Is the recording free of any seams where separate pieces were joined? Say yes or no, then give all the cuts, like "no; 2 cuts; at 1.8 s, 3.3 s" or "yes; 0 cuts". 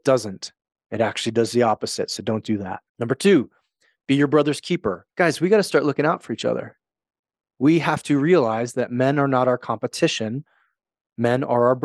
no; 2 cuts; at 2.9 s, 5.1 s